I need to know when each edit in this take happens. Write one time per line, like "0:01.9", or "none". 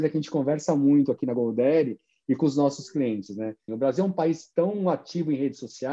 0:03.7